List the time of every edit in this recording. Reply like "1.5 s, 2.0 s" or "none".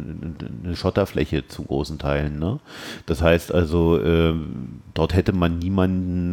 none